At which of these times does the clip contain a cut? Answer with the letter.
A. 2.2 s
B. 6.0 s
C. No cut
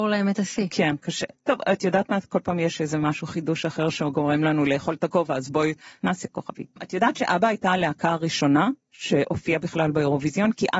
B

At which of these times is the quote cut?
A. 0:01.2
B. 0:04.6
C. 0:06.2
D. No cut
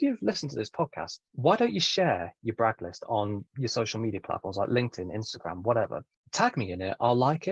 D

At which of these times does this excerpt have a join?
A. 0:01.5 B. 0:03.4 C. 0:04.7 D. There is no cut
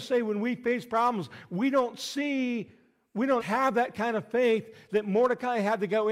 B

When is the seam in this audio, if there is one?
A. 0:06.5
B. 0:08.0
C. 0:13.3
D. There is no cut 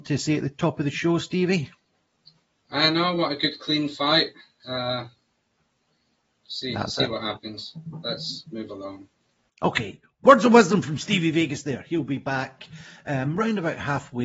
A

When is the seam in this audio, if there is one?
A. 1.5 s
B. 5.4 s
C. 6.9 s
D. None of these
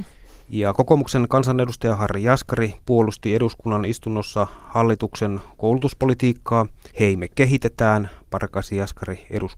C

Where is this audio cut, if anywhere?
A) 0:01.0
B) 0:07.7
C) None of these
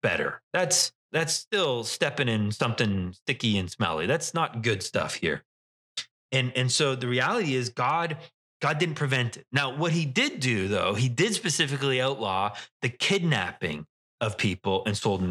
A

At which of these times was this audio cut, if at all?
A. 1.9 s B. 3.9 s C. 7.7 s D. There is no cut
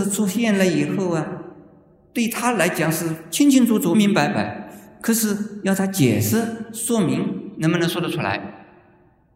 B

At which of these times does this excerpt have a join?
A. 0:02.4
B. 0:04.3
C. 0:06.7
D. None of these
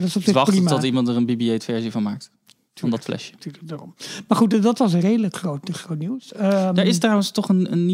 D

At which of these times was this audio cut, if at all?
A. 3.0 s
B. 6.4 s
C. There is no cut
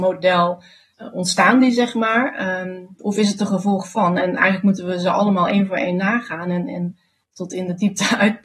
A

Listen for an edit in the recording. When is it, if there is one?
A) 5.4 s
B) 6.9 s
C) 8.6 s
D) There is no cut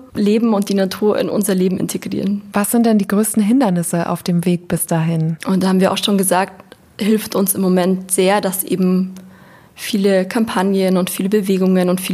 A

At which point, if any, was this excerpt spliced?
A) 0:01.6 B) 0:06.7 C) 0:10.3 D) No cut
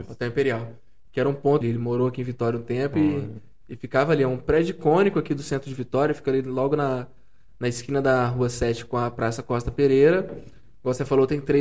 A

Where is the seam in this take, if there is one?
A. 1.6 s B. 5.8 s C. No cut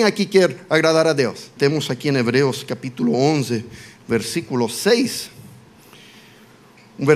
A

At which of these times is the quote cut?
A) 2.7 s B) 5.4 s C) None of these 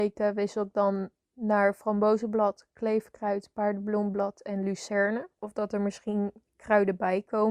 B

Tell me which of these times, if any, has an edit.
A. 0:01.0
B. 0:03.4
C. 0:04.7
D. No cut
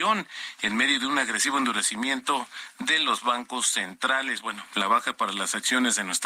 C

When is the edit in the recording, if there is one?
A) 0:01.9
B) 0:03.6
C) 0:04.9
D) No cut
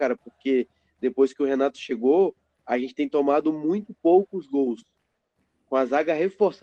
D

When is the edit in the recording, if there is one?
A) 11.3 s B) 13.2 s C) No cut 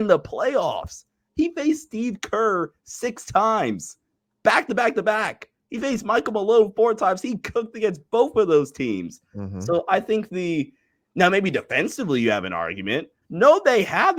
B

